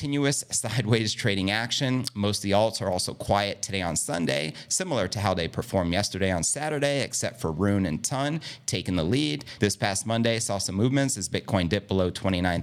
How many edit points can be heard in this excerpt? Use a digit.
1